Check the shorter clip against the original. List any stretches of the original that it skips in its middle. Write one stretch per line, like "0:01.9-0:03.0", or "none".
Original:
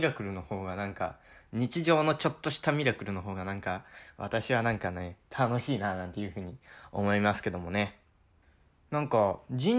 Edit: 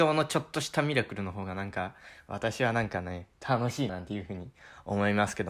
0:05.8-0:06.0

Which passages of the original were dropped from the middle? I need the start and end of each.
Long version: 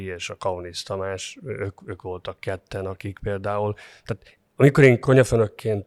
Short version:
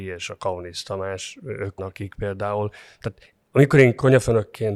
0:01.8-0:02.8

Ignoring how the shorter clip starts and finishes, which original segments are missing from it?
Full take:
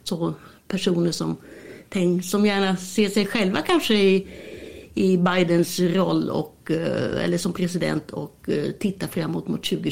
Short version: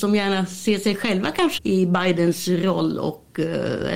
0:03.9-0:04.9

